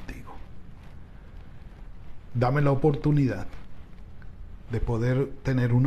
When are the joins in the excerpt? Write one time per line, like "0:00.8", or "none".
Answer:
none